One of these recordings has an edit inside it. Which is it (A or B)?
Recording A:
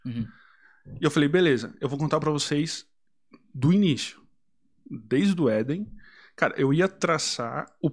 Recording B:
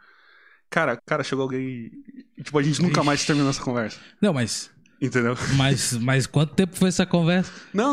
B